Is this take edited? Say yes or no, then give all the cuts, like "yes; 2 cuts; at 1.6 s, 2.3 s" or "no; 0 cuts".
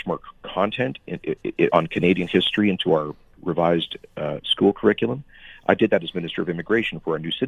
no; 0 cuts